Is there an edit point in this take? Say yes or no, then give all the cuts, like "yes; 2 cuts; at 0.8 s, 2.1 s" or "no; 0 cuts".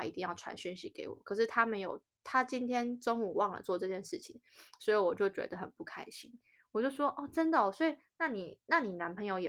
no; 0 cuts